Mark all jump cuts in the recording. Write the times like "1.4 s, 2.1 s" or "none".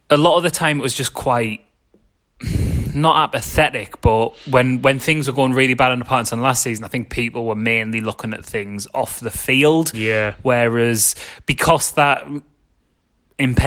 none